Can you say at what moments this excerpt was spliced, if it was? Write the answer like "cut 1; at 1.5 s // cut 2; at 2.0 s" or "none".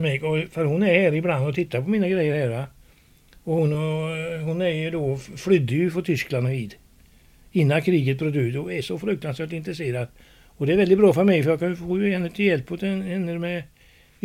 none